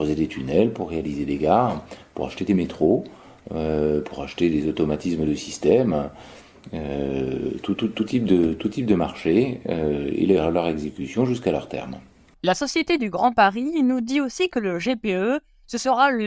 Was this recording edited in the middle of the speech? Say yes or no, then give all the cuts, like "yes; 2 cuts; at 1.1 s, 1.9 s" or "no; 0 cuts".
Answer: no; 0 cuts